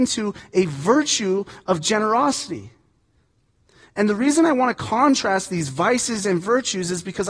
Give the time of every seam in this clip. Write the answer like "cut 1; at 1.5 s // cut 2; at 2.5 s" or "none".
none